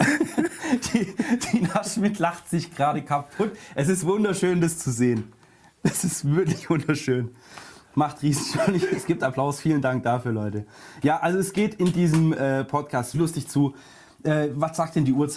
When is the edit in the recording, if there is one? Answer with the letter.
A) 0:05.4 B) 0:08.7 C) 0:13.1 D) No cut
C